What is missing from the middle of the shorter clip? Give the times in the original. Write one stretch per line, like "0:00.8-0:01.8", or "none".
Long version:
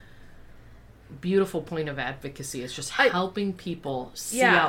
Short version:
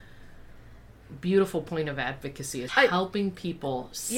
0:02.7-0:02.9